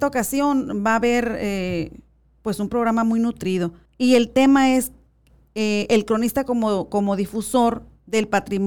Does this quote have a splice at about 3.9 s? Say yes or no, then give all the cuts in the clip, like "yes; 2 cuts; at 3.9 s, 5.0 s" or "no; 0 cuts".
yes; 1 cut; at 3.9 s